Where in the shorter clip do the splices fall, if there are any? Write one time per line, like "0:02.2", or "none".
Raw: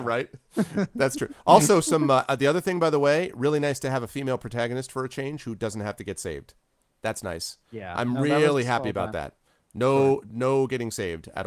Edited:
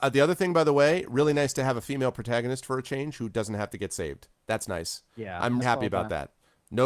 0:04.4
0:05.6

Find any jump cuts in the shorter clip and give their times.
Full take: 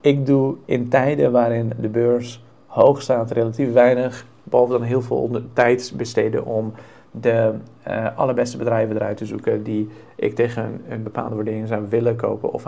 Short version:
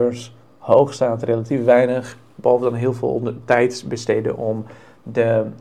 none

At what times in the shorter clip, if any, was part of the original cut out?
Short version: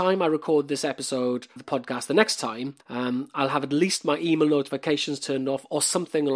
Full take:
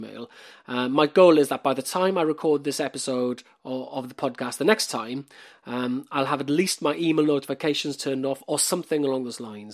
0:01.6
0:02.8

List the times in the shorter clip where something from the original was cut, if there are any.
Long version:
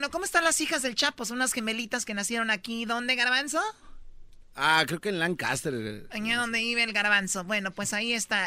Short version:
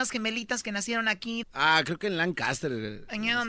0:01.4

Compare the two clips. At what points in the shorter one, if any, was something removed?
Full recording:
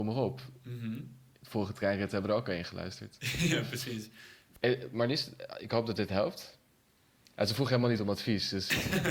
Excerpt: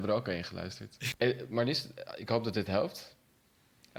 0:01.1

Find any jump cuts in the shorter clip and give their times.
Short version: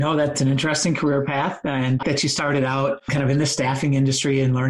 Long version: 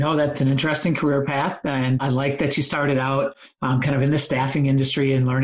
0:02.0
0:03.1

